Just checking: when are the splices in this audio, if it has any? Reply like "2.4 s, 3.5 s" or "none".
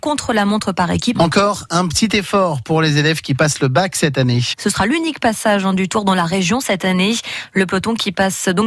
1.1 s, 4.5 s